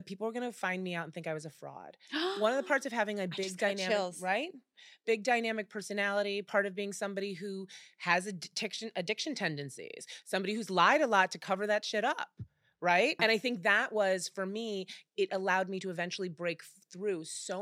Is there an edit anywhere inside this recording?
yes; 2 cuts; at 13.2 s, 15.1 s

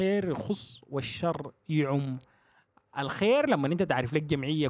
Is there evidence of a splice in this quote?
no; 0 cuts

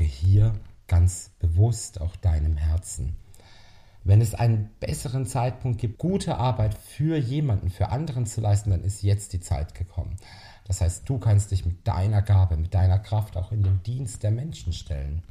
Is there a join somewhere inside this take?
yes; 2 cuts; at 4.0 s, 6.0 s

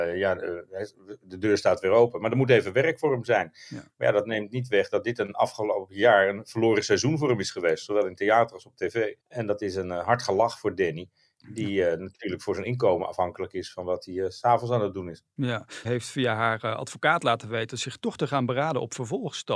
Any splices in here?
yes; 2 cuts; at 9.2 s, 15.8 s

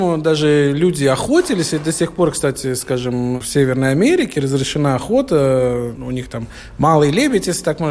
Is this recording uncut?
yes; 0 cuts

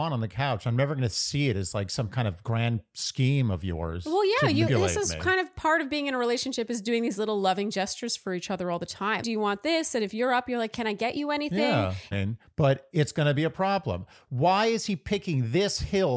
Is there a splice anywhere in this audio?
yes; 3 cuts; at 4.7 s, 9.2 s, 12.1 s

